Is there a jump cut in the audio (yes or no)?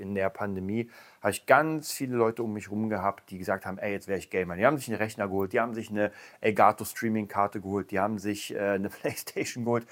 no